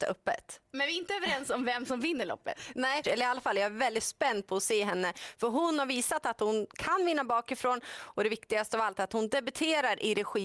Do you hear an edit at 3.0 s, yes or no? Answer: yes